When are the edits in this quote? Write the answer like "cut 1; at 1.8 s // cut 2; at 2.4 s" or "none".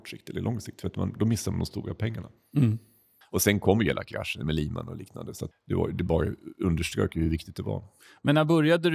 cut 1; at 3.2 s // cut 2; at 5.5 s